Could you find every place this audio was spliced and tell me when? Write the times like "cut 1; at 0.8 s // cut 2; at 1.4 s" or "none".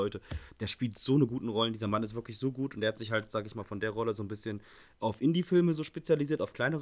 none